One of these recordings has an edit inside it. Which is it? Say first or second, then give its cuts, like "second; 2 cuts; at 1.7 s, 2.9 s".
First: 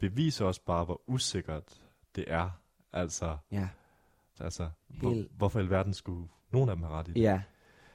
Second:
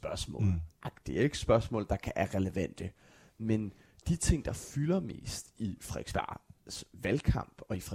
first; 1 cut; at 4.3 s